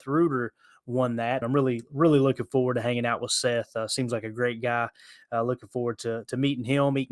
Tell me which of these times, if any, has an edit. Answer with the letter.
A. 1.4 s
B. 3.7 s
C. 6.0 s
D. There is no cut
A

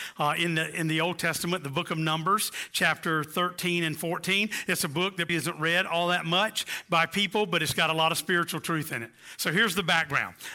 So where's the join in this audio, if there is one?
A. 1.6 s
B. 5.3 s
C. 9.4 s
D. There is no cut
B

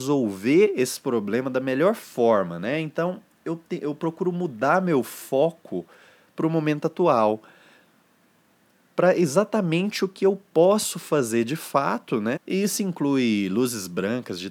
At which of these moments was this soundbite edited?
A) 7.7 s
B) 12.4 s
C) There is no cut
B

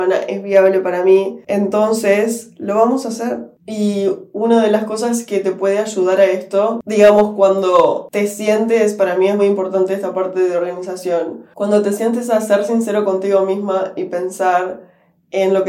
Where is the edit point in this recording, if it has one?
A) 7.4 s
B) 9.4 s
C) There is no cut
B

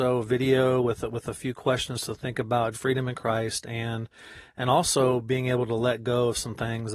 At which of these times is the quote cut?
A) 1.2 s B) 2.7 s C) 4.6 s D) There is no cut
B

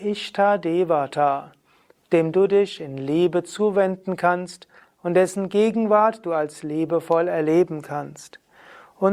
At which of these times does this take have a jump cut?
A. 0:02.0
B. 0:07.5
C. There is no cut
A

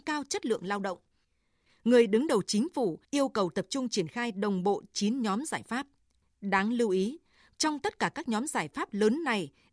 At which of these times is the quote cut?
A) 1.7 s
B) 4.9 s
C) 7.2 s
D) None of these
A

